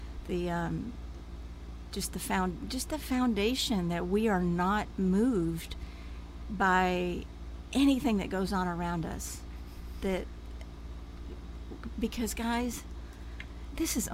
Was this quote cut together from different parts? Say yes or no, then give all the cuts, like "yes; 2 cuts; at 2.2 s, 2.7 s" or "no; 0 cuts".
no; 0 cuts